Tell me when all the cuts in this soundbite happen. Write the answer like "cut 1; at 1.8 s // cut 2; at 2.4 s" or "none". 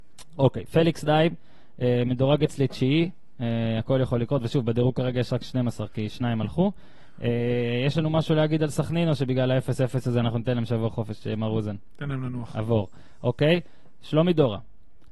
none